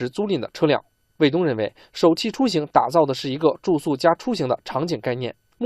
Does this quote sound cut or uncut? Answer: uncut